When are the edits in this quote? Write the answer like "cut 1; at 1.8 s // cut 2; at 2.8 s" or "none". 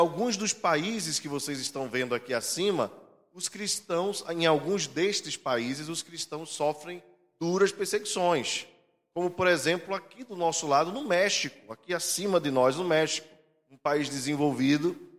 none